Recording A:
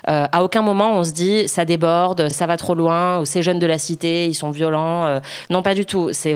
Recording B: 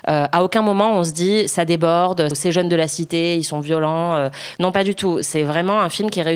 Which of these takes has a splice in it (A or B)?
B